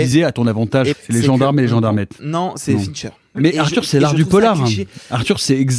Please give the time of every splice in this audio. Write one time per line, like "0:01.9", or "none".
0:00.9
0:03.3